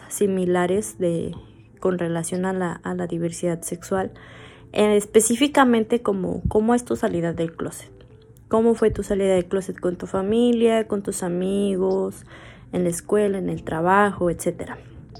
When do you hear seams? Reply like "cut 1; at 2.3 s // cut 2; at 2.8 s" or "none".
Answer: none